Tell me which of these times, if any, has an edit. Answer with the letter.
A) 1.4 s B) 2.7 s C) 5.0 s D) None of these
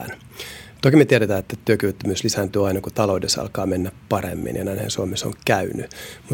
D